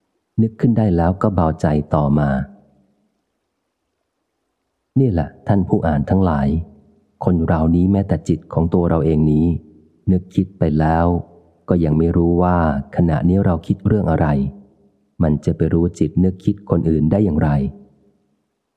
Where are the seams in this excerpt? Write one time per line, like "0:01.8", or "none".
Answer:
none